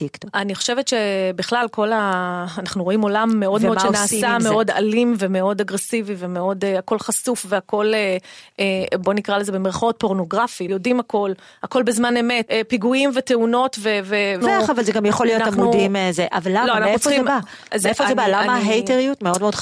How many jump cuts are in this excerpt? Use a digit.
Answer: 3